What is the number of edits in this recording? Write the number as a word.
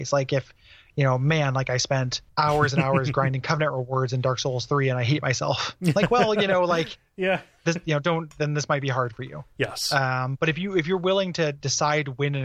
one